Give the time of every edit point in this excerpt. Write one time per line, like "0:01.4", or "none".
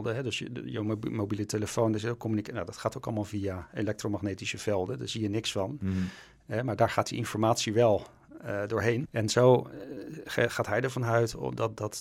0:09.0